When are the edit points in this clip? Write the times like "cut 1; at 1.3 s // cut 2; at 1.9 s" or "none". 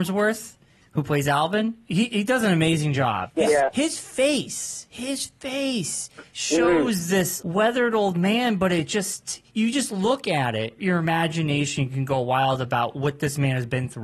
none